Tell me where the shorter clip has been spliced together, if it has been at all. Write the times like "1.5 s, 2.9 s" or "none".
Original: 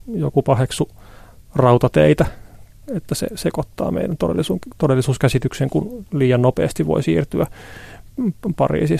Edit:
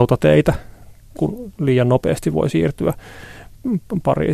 1.2 s